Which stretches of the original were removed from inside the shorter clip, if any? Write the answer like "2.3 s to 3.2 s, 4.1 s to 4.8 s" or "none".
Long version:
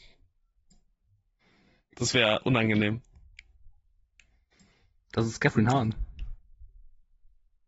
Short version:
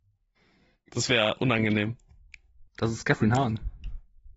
3.7 s to 5.0 s